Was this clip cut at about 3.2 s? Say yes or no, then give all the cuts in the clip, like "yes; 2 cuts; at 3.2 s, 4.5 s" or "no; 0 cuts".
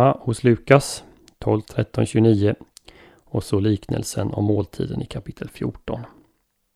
no; 1 cut; at 1.6 s